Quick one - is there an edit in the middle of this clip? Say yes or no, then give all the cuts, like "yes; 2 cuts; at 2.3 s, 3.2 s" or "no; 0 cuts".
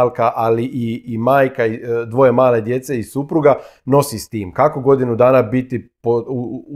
no; 0 cuts